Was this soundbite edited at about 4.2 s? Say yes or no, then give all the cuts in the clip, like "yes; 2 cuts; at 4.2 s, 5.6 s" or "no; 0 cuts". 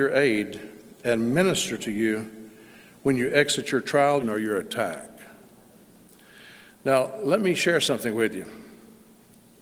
yes; 1 cut; at 4.2 s